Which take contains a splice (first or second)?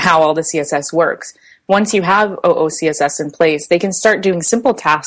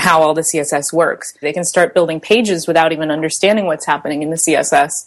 second